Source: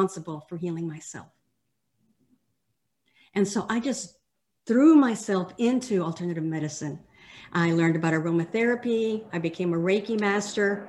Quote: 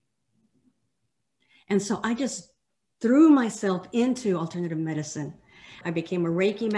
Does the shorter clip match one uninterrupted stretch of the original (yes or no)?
no